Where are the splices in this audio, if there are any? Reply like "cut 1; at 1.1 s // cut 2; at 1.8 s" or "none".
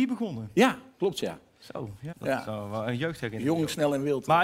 cut 1; at 2.1 s

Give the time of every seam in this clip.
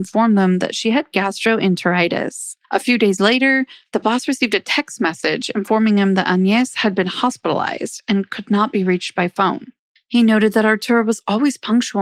cut 1; at 2.6 s // cut 2; at 10.0 s

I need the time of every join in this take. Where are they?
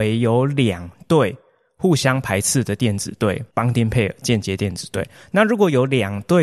cut 1; at 3.5 s

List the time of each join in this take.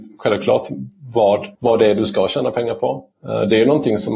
cut 1; at 1.6 s // cut 2; at 3.1 s

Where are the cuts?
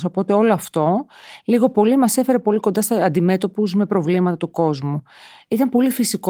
none

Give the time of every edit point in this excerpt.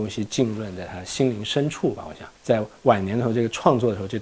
cut 1; at 2.3 s

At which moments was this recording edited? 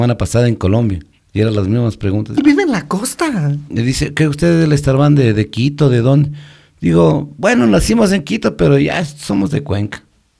cut 1; at 2.4 s // cut 2; at 3.7 s

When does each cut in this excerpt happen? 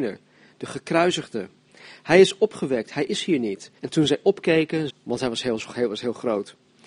cut 1; at 3.8 s // cut 2; at 4.9 s

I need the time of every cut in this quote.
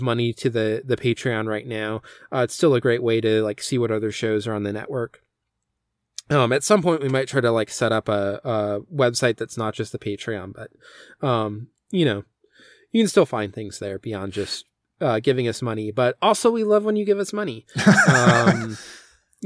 none

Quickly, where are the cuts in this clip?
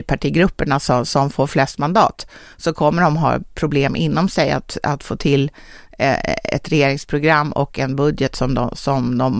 none

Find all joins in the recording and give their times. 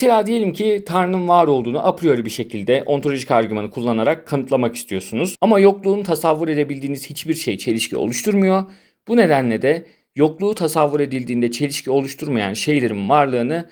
cut 1; at 5.3 s

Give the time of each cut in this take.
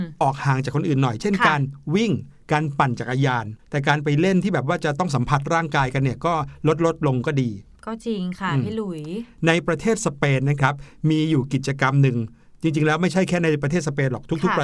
cut 1; at 3.6 s

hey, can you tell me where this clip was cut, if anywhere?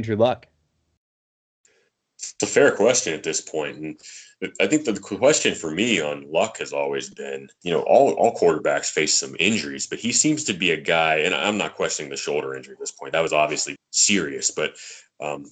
cut 1; at 7.6 s // cut 2; at 13.8 s

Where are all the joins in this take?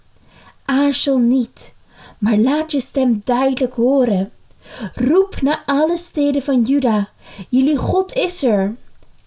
none

